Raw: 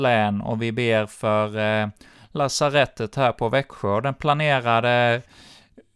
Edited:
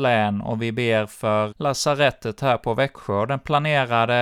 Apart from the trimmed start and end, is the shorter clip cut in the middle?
yes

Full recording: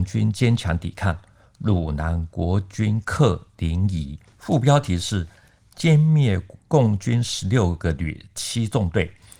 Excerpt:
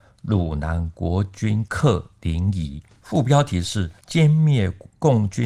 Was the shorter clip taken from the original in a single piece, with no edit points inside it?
no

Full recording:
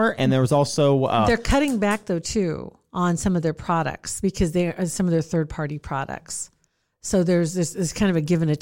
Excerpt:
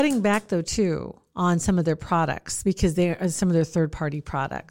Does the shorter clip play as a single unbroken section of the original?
yes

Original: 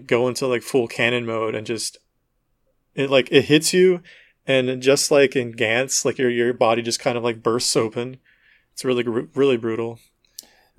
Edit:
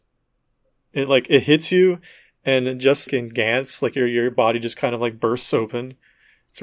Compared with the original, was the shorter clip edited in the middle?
yes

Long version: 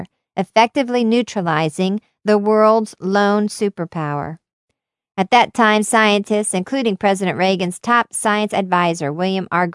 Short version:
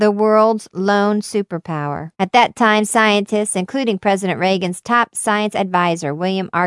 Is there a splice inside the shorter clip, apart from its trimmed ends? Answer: yes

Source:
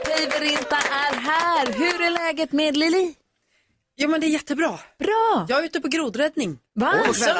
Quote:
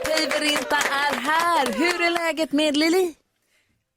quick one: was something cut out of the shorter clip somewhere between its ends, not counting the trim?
no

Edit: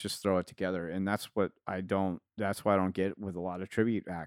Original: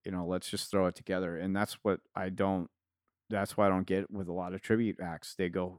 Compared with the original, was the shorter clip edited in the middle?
yes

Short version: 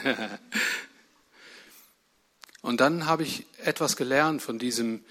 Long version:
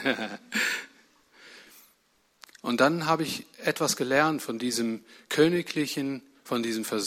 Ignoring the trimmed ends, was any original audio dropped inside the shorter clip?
no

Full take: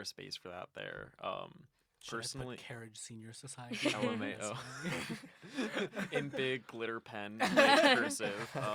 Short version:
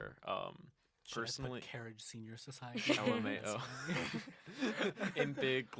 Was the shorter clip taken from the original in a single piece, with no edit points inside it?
yes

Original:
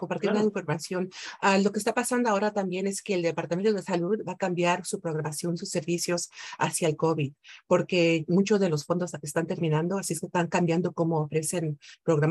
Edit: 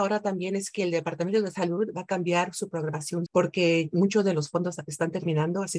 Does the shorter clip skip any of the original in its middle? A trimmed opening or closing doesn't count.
yes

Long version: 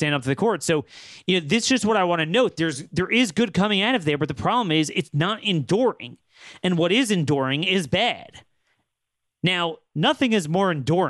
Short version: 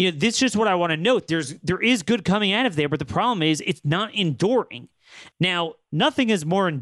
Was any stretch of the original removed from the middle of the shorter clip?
yes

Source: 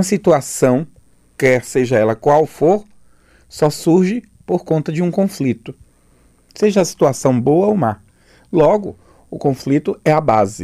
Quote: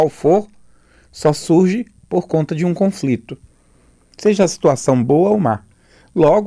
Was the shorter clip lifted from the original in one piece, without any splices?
yes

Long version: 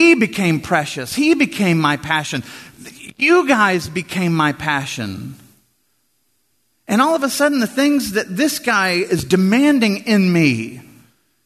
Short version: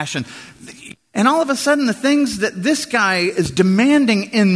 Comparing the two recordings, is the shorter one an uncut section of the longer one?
no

